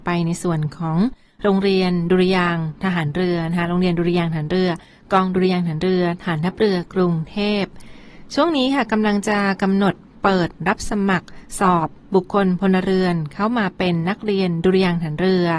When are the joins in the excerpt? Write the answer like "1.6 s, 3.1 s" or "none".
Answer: none